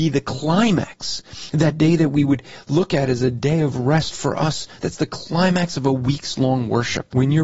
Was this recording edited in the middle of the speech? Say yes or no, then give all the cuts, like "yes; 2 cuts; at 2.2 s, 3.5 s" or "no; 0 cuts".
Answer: yes; 1 cut; at 4.8 s